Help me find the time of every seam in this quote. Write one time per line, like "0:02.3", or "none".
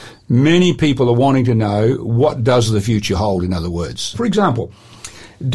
0:04.1